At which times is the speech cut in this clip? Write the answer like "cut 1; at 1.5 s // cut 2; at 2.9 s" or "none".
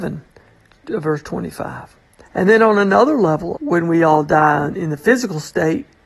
cut 1; at 2.2 s // cut 2; at 3.5 s